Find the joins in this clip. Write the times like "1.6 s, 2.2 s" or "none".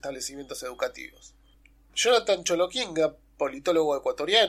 none